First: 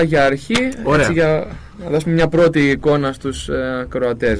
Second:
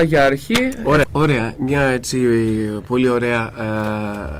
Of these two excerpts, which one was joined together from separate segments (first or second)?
second